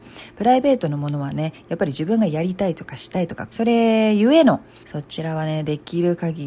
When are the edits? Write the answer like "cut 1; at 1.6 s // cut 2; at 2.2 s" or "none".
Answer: cut 1; at 3.5 s // cut 2; at 4.8 s